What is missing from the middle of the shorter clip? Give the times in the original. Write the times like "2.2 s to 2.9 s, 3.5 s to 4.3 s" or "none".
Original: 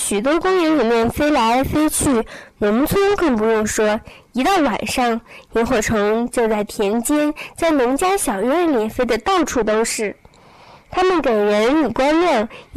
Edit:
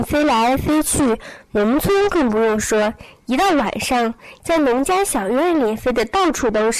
5.5 s to 7.5 s

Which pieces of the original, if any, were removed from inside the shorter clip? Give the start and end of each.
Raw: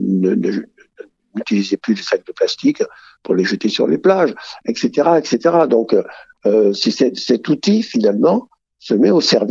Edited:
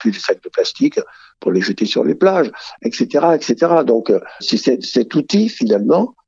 6.2 s to 6.7 s

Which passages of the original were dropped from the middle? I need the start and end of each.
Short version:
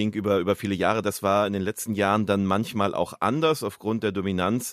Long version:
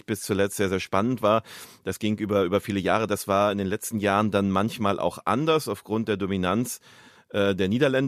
none

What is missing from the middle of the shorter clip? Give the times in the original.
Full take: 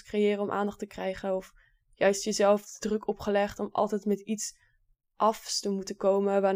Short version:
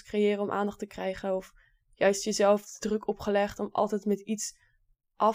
none

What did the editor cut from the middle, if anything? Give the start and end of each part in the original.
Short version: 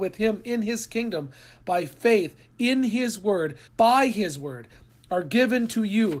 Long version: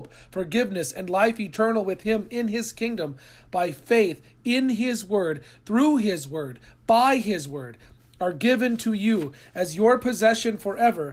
5.5 s to 6.8 s

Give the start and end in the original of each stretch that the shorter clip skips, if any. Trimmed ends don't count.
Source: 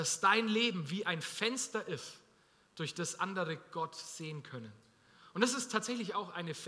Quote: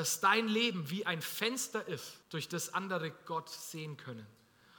2.2 s to 2.7 s

